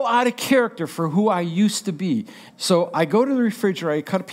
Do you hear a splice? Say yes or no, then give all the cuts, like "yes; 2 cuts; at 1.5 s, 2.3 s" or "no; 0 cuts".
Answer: yes; 1 cut; at 2.5 s